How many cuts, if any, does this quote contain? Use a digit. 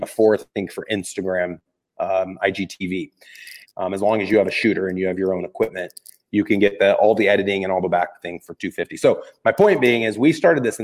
1